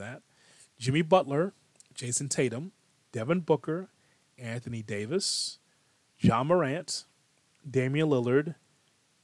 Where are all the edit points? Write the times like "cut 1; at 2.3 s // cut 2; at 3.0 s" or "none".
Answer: none